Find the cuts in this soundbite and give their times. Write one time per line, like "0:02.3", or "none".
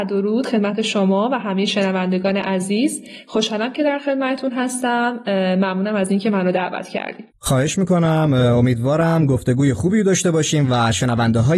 0:07.3